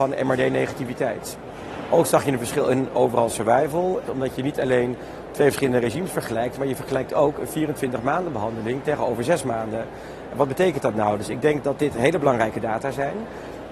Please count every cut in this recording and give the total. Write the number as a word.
one